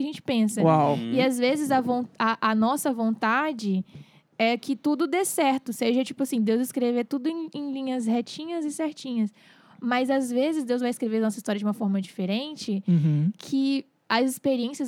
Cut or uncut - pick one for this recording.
uncut